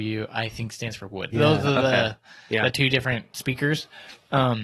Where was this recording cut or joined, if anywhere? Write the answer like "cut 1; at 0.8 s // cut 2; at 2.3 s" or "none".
cut 1; at 1.3 s